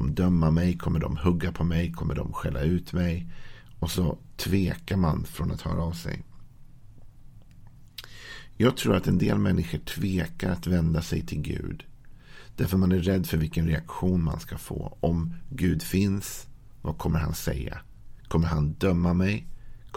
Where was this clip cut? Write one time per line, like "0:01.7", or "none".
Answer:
none